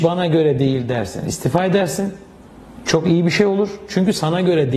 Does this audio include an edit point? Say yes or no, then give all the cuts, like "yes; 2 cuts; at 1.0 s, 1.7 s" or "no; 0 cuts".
no; 0 cuts